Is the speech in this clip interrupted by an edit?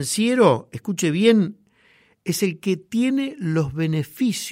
no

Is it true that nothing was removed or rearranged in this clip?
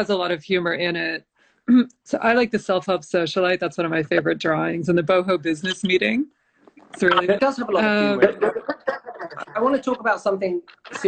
no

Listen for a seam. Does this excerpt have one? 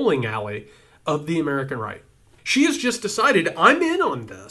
yes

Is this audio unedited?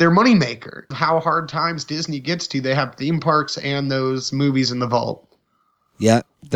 no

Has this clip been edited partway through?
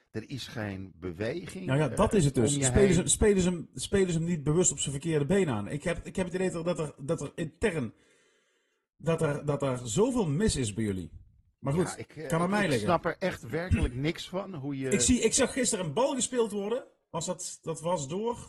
no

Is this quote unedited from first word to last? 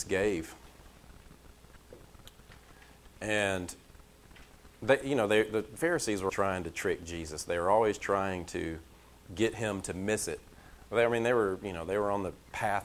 no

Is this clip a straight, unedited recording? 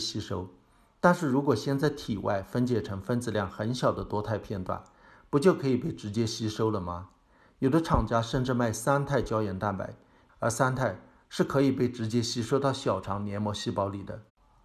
no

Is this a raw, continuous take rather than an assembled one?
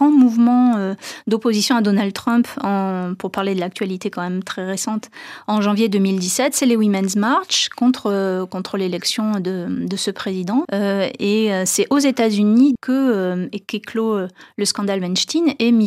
no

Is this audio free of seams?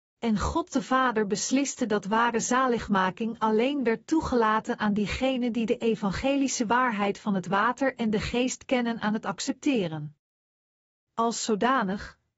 yes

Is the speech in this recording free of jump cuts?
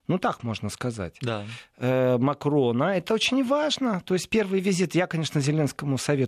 yes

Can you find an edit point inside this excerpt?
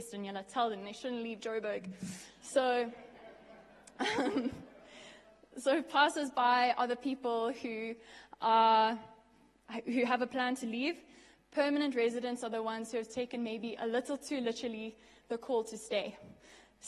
no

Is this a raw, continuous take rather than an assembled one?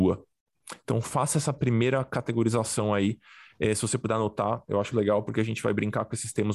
no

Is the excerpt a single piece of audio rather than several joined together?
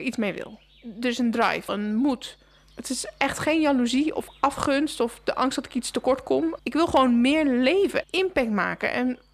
no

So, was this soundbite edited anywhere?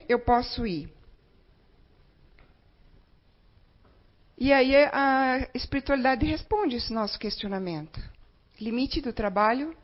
no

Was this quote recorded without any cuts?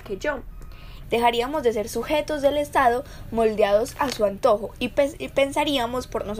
no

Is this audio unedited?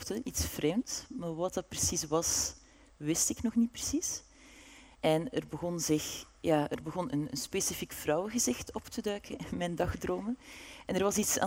no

